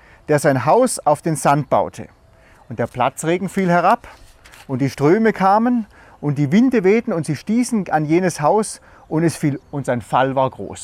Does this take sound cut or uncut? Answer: cut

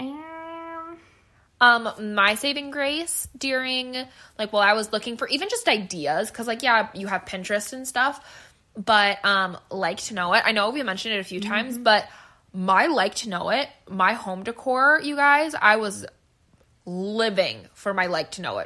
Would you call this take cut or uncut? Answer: uncut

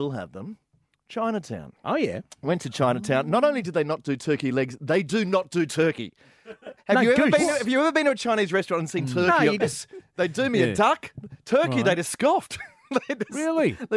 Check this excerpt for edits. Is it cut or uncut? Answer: cut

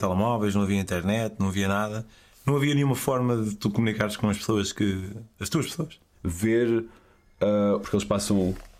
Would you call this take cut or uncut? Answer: cut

